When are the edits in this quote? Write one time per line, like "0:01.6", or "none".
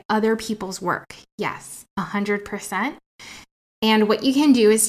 none